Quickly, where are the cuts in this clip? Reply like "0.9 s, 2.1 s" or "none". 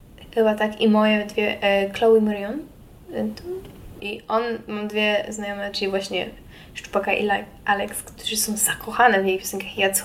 4.0 s